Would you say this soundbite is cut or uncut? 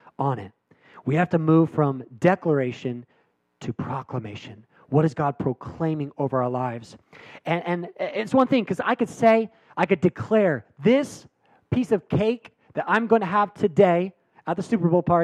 uncut